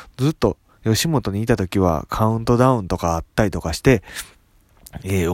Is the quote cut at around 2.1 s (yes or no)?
no